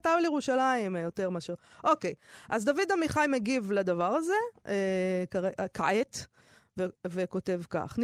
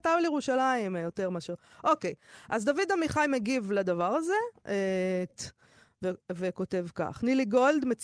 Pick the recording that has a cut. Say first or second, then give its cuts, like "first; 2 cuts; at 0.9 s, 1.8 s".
second; 1 cut; at 5.3 s